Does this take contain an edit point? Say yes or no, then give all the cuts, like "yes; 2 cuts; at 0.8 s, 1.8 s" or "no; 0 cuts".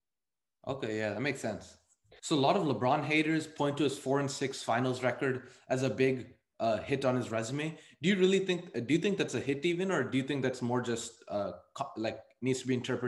yes; 1 cut; at 2.2 s